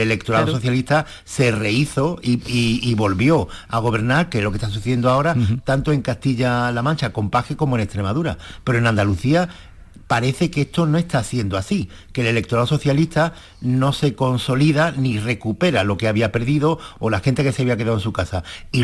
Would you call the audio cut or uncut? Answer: uncut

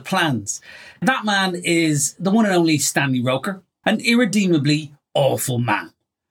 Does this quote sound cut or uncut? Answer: cut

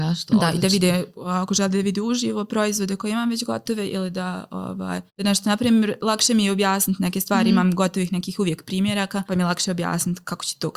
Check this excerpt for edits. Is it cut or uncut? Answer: cut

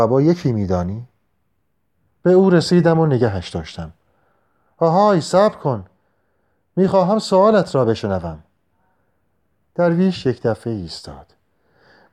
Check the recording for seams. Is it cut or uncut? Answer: cut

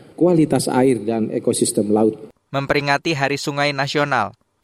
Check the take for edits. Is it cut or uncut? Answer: cut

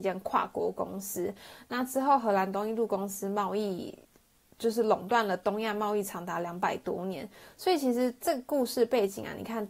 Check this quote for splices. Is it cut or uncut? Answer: uncut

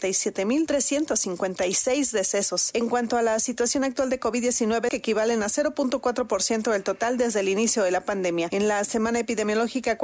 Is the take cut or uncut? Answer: cut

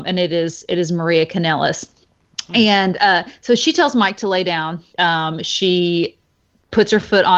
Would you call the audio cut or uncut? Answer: cut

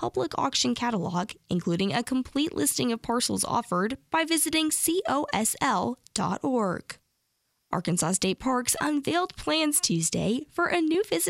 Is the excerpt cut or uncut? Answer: uncut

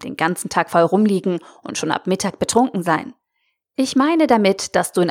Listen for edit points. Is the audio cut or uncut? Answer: uncut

